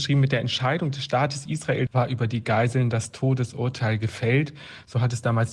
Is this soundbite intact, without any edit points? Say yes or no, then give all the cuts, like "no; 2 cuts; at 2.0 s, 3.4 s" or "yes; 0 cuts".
no; 1 cut; at 1.9 s